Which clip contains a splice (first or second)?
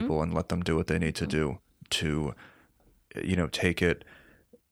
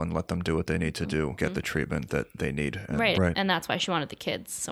second